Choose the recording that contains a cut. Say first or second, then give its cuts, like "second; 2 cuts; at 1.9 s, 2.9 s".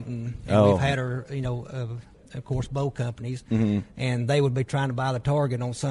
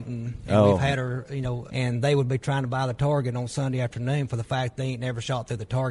second; 1 cut; at 1.7 s